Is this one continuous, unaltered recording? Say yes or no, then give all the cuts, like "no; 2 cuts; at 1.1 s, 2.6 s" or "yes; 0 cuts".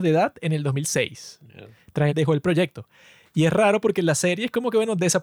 no; 1 cut; at 2.1 s